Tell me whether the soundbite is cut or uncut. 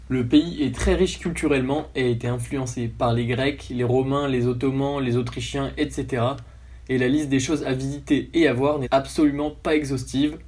cut